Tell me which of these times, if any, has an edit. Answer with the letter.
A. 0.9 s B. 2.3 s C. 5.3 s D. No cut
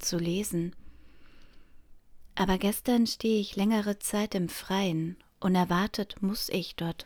D